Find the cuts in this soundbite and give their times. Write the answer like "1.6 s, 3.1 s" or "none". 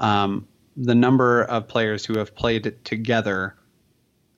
none